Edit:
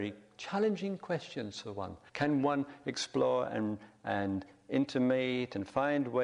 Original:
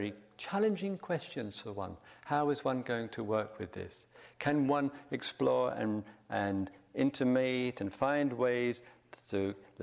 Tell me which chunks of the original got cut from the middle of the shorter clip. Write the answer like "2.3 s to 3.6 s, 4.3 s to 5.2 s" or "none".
2.1 s to 4.3 s